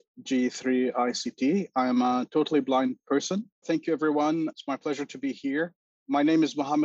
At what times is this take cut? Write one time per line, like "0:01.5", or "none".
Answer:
0:03.6